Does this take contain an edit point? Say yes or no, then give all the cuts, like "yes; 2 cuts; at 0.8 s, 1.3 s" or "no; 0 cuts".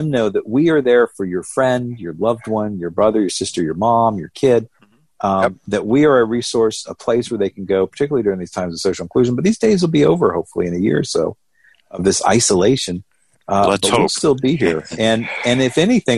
no; 0 cuts